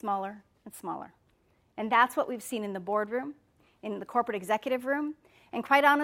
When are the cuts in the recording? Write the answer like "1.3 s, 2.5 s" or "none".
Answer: none